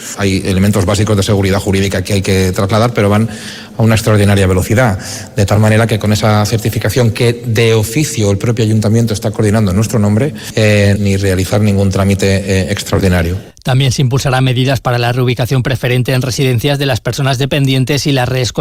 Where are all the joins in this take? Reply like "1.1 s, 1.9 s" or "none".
10.9 s